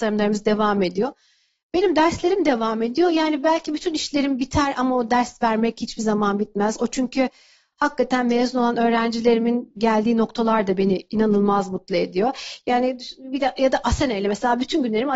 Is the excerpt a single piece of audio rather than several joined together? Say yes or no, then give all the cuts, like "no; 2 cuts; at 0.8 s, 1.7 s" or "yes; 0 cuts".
yes; 0 cuts